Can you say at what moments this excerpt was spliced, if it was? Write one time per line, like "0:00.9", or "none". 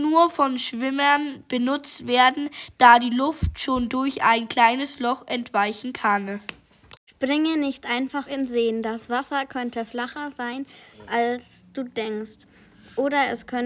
0:08.3